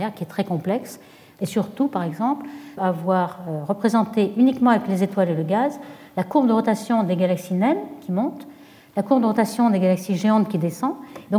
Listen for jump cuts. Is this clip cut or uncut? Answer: cut